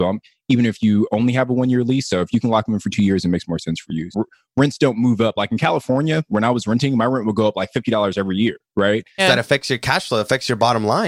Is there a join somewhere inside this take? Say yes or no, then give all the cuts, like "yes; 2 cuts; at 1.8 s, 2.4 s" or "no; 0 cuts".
yes; 2 cuts; at 4.1 s, 9.2 s